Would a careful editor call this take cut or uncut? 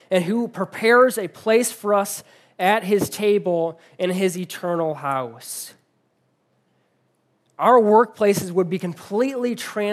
uncut